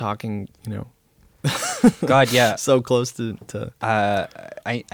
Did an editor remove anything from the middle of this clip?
no; 0 cuts

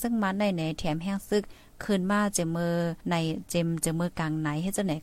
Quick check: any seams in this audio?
yes; 1 cut; at 3.0 s

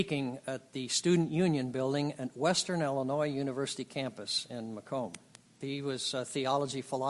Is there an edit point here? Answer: yes; 1 cut; at 5.6 s

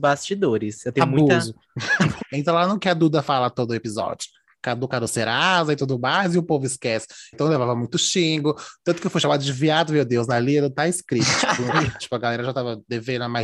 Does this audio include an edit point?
yes; 3 cuts; at 2.2 s, 7.3 s, 12.0 s

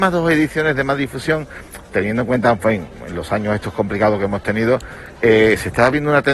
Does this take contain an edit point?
no; 0 cuts

